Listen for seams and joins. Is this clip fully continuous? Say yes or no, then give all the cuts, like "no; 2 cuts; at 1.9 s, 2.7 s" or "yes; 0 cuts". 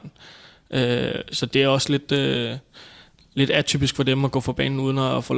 yes; 0 cuts